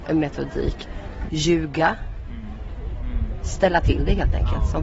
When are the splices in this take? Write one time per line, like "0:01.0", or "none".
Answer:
0:01.3
0:02.9